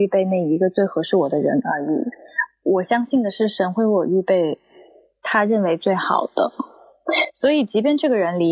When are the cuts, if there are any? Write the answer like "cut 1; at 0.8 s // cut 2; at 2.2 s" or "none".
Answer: none